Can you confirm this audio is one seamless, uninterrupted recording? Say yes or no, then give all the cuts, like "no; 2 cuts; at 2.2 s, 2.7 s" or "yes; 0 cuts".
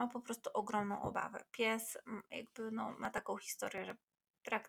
yes; 0 cuts